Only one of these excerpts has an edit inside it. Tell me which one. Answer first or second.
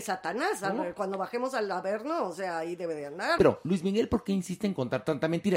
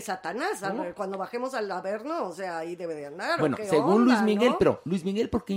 first